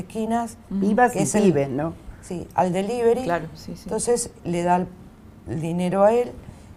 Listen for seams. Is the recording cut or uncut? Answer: cut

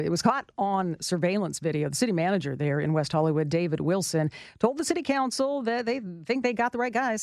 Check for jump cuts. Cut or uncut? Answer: uncut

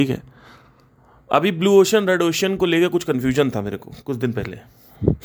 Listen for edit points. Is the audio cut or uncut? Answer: uncut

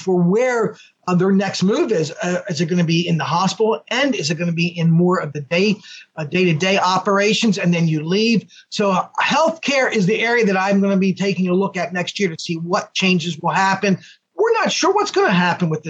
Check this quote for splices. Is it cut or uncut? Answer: uncut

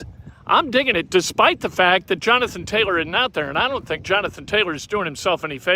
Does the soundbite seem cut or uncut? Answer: uncut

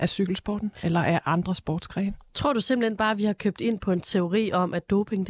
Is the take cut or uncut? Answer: uncut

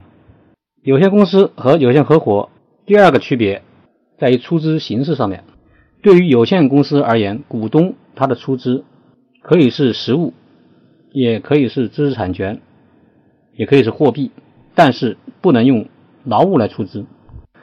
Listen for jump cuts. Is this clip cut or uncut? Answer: uncut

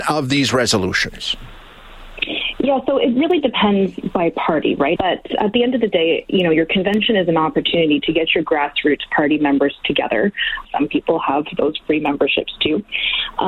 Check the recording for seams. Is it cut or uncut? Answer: cut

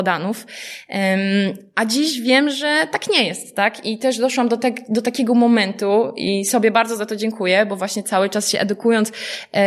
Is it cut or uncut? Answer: uncut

